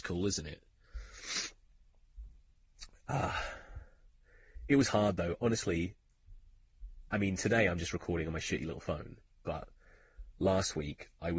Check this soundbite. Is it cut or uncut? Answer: uncut